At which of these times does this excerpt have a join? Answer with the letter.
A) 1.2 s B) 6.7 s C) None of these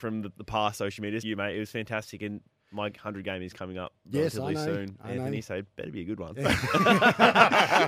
A